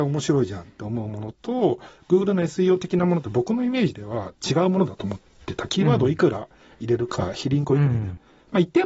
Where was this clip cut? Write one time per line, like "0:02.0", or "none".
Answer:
none